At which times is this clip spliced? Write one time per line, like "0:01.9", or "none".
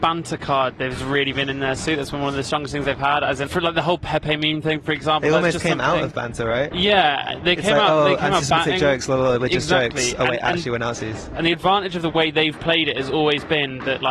0:03.5